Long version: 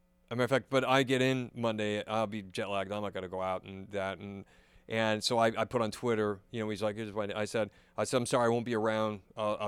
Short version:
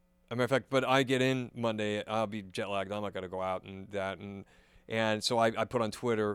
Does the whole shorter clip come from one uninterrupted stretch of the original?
yes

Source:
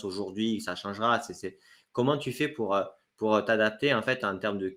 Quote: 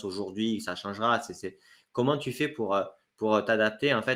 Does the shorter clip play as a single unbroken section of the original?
yes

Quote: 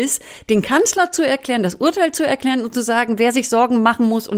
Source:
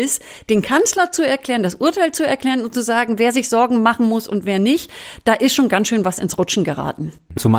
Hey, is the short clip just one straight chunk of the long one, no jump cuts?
yes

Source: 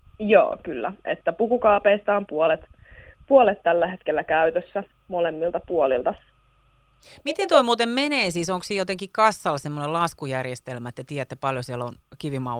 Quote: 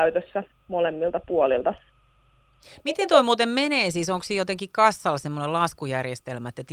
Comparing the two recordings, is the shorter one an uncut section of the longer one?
yes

